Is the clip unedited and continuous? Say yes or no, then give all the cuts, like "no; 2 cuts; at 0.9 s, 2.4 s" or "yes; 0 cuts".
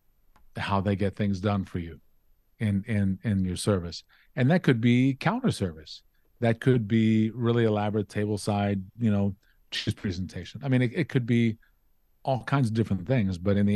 yes; 0 cuts